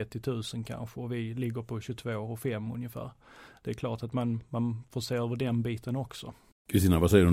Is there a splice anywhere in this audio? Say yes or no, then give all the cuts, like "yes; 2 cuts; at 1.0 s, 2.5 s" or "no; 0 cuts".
no; 0 cuts